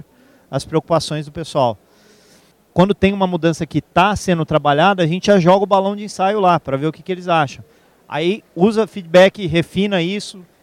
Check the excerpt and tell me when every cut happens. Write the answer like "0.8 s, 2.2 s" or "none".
2.5 s